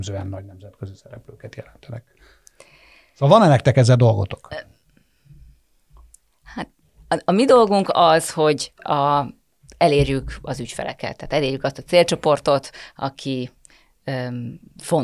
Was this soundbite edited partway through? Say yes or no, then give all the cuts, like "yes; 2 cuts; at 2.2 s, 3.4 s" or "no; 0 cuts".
no; 0 cuts